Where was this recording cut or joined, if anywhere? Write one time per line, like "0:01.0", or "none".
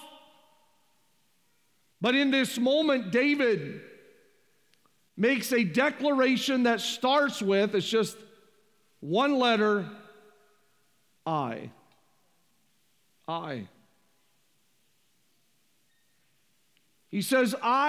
0:11.2